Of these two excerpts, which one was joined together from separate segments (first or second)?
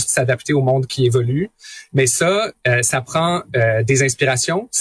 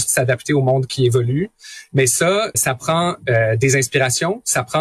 second